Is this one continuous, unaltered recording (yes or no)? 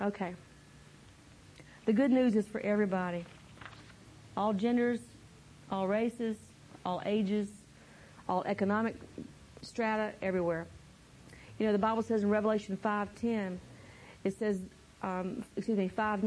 yes